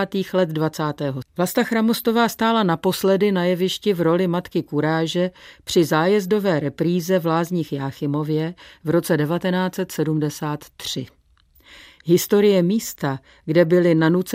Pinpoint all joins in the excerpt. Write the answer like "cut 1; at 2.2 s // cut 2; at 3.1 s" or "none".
cut 1; at 1.2 s